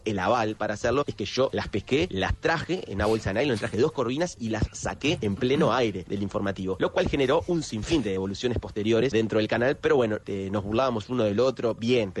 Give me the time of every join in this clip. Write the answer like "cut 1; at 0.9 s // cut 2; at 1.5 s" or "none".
cut 1; at 9.1 s // cut 2; at 10.2 s

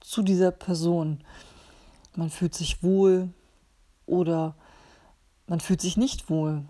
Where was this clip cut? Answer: cut 1; at 2.1 s

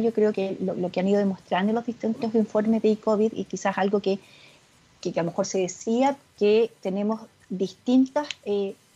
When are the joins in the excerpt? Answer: cut 1; at 6.2 s

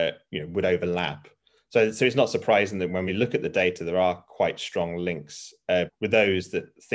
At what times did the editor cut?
cut 1; at 3.1 s // cut 2; at 5.9 s

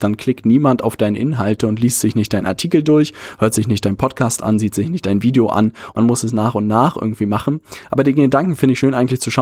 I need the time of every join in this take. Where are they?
cut 1; at 5.9 s

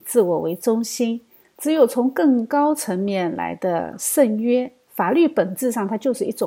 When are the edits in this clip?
cut 1; at 1.5 s // cut 2; at 4.9 s

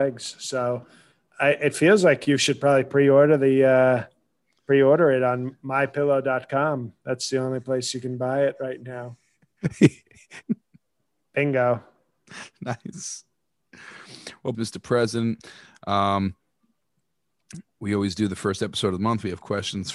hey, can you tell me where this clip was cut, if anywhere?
cut 1; at 10.4 s // cut 2; at 14.5 s

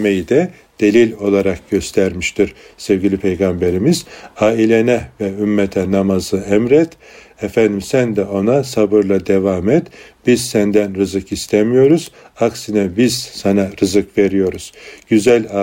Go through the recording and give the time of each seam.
none

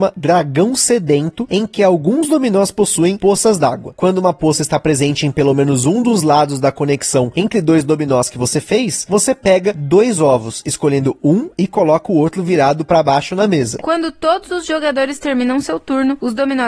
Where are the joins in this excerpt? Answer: cut 1; at 13.8 s

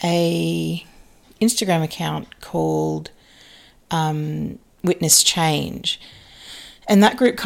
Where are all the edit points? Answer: none

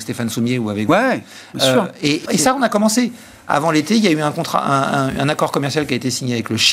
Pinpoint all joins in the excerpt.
cut 1; at 2.3 s

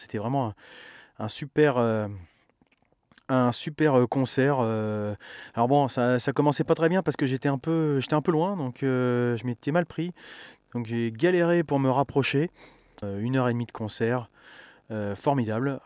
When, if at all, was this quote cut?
cut 1; at 13.0 s

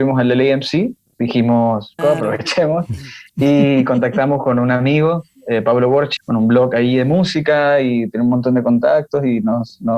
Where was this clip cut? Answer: cut 1; at 2.0 s // cut 2; at 6.2 s

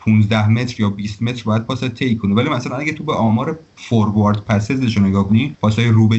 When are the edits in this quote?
cut 1; at 5.3 s

